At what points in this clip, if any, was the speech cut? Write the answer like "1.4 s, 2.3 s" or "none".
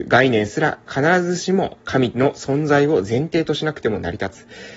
none